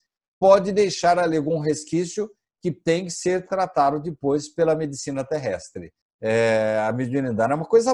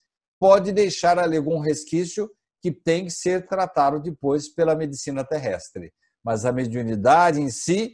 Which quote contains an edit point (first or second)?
first